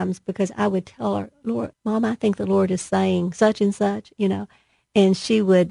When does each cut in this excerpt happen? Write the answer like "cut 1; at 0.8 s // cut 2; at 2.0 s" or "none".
cut 1; at 1.7 s